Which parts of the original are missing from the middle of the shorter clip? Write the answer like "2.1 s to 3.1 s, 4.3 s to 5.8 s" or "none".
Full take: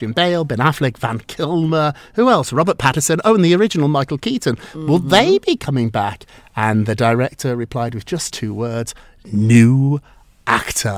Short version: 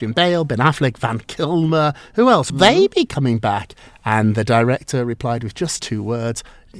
2.5 s to 5.0 s